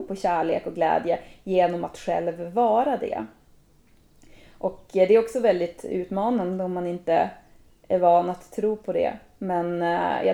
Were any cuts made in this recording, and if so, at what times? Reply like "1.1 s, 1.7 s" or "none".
none